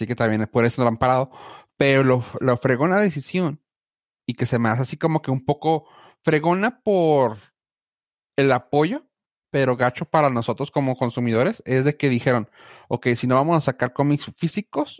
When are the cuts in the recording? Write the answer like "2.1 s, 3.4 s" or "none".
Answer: none